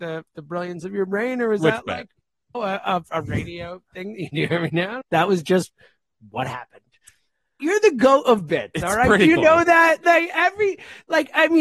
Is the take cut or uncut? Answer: cut